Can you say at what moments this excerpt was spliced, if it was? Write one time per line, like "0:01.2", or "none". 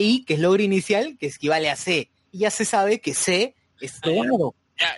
0:04.0